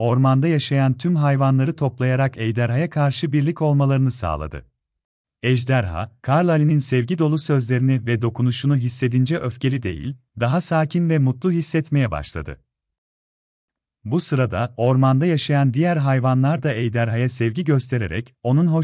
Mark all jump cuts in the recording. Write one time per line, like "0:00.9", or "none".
0:05.2